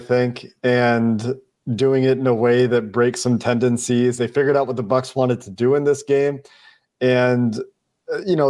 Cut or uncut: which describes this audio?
uncut